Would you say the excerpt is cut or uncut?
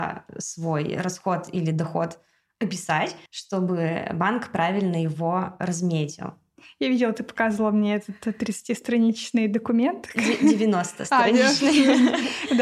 cut